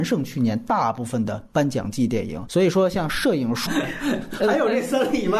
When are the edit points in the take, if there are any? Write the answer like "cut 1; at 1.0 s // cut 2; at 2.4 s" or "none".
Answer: cut 1; at 3.7 s